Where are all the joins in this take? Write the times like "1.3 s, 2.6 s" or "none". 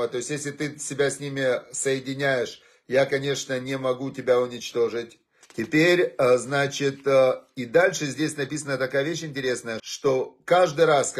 5.4 s, 9.8 s